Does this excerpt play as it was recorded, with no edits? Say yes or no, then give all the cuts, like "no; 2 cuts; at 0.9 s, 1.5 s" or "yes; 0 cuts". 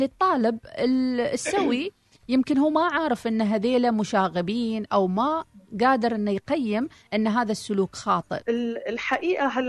no; 1 cut; at 8.4 s